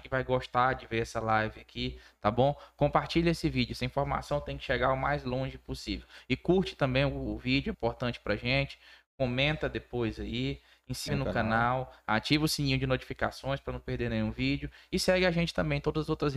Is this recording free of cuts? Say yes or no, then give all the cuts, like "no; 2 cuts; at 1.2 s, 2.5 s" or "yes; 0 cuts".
no; 2 cuts; at 7.7 s, 11.1 s